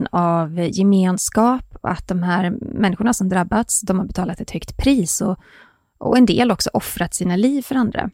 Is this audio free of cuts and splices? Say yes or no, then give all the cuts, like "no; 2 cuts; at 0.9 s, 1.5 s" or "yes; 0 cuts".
yes; 0 cuts